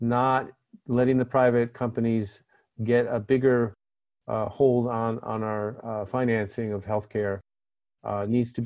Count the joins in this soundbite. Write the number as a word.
zero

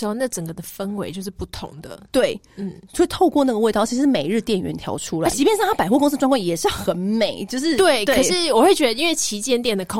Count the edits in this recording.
one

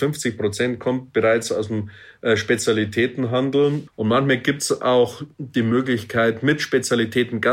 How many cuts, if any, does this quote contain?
one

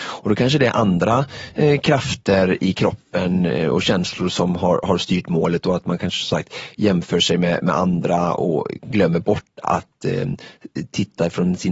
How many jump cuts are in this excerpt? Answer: zero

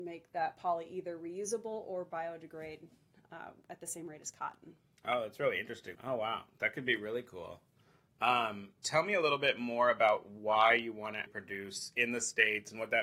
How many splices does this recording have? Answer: three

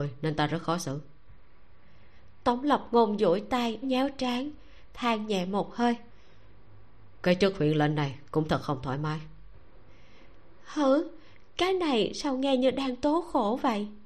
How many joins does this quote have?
one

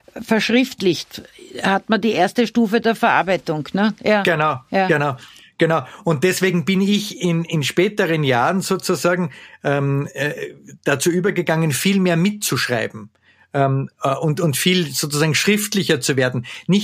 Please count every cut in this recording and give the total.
zero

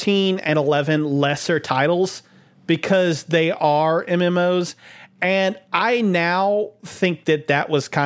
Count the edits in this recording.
zero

